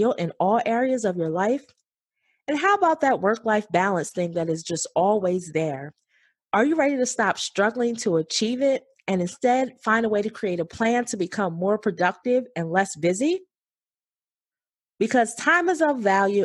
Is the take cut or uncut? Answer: uncut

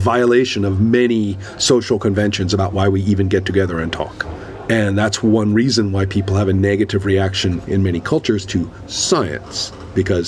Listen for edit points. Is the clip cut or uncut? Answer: uncut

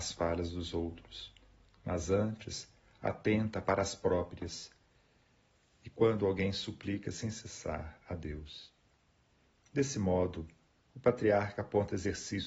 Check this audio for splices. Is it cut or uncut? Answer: uncut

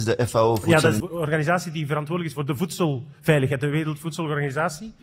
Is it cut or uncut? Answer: cut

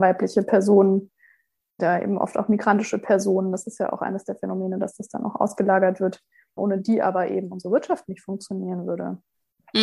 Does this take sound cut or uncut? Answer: cut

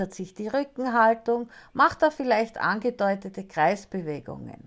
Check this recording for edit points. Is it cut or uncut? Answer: uncut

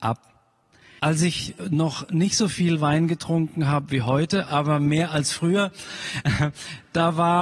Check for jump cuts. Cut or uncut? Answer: cut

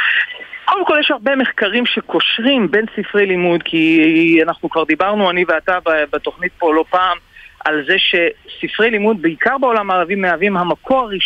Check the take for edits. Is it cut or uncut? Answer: uncut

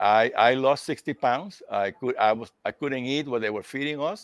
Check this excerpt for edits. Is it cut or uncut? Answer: uncut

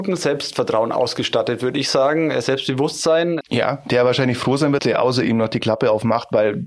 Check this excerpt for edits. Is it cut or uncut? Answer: cut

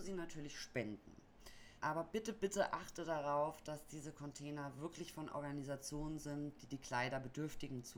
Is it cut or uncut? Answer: cut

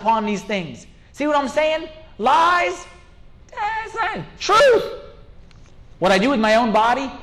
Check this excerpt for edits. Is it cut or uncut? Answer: cut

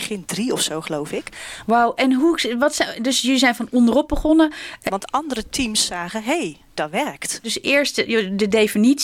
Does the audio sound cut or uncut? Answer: cut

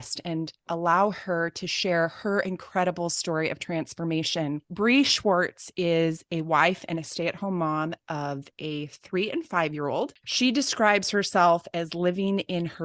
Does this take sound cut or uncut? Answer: uncut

